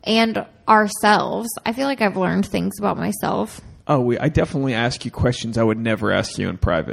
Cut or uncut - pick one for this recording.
uncut